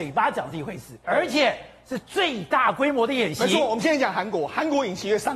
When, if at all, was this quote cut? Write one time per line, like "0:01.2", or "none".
0:01.0